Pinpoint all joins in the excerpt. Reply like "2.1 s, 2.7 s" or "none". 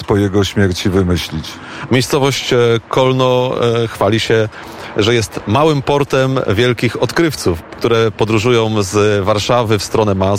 1.9 s, 7.6 s